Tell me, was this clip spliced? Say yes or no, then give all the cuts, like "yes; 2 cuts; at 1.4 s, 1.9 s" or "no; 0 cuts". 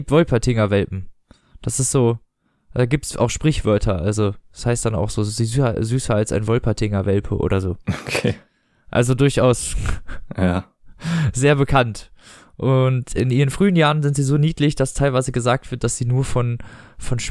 no; 0 cuts